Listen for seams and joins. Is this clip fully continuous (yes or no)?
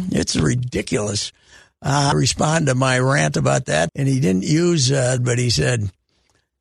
no